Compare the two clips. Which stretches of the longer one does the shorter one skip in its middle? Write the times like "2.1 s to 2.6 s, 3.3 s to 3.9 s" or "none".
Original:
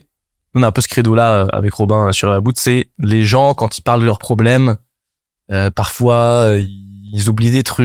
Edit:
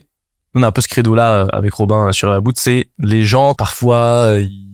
3.6 s to 5.7 s